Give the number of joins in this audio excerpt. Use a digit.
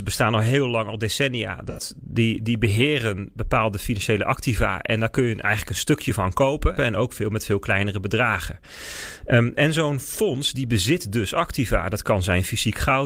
1